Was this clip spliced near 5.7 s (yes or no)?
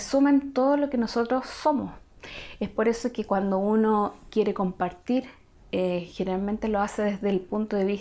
no